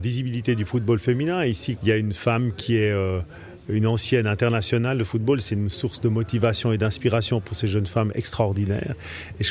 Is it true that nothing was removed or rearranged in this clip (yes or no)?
no